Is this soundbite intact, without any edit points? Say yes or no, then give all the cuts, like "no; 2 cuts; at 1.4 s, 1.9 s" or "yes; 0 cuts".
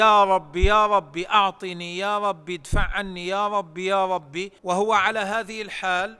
no; 1 cut; at 4.6 s